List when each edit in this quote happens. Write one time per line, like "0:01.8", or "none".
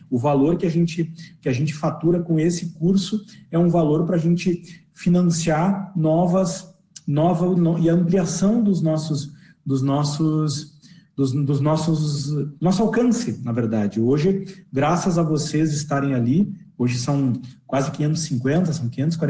0:07.6
0:12.6